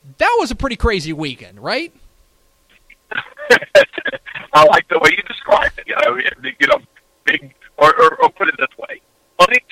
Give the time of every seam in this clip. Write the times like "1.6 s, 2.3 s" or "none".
5.9 s